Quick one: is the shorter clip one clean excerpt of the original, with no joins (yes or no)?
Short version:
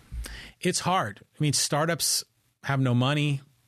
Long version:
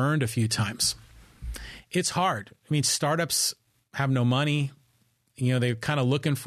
yes